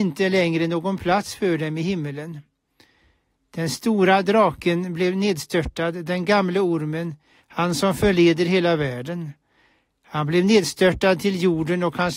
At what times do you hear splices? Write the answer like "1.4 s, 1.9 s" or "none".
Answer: 7.4 s